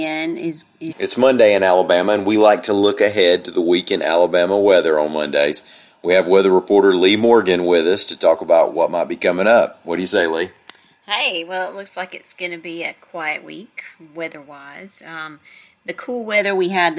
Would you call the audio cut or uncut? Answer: cut